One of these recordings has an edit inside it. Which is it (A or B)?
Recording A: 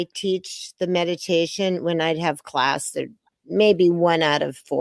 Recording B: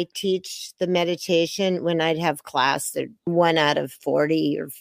B